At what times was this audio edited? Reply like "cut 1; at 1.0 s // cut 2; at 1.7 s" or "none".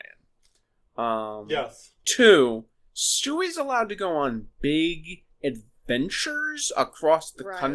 none

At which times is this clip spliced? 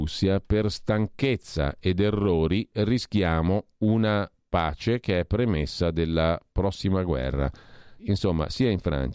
cut 1; at 8.0 s

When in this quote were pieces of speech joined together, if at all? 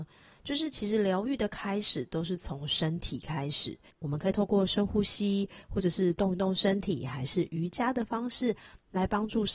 cut 1; at 3.9 s

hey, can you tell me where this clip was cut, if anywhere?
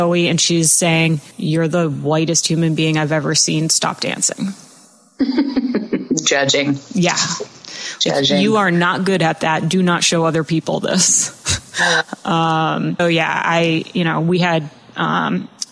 cut 1; at 1.3 s // cut 2; at 13.0 s

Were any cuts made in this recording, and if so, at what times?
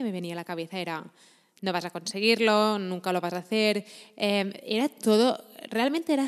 none

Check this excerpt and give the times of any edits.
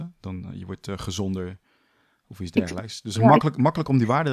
none

